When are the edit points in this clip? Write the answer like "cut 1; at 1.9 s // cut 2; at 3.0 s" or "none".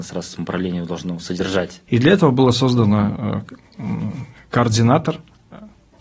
cut 1; at 1.9 s